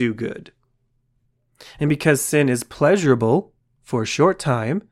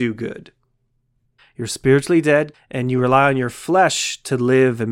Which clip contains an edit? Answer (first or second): second